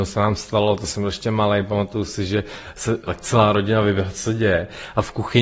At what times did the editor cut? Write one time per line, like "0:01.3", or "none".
0:03.1

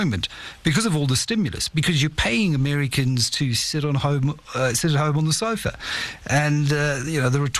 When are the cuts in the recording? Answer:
none

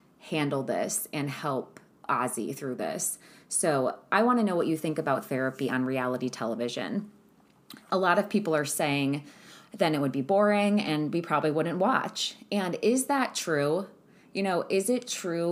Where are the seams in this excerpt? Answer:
none

